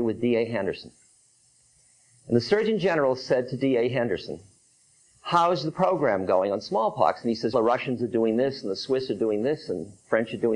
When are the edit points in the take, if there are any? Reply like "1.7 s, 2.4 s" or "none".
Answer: 7.5 s